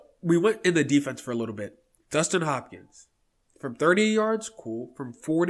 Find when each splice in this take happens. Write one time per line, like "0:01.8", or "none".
0:02.0

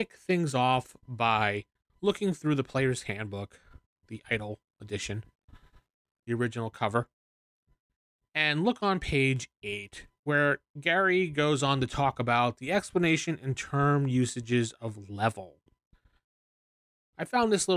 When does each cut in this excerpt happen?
none

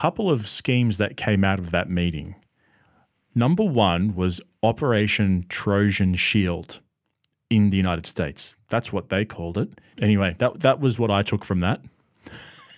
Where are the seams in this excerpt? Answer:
0:09.9

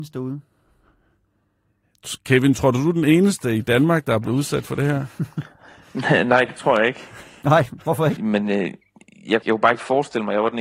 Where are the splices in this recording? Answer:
0:08.2
0:09.4

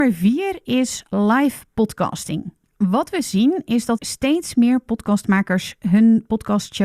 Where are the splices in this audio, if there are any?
0:04.0

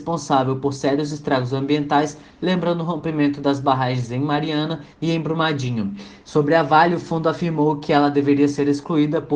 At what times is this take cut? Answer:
0:06.2

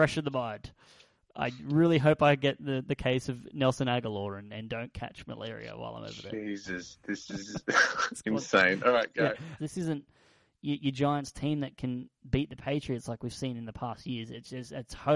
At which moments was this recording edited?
0:09.6

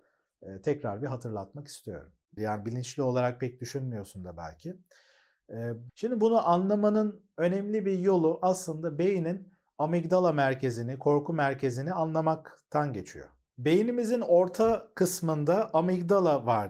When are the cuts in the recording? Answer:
0:02.4
0:05.9

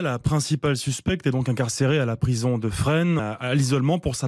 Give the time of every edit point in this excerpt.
0:03.2

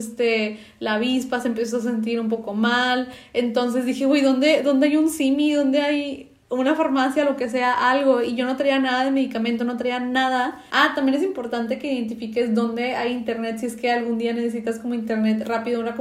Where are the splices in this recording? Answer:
0:10.7

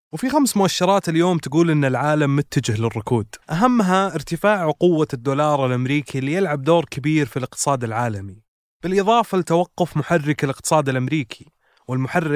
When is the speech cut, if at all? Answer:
0:03.4

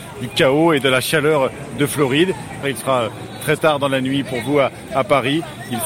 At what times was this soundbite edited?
0:02.6

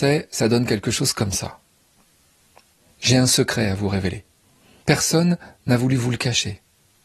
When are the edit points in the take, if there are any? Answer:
none

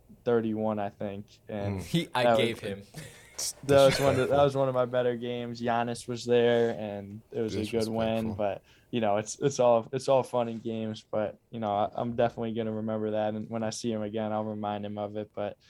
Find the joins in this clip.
none

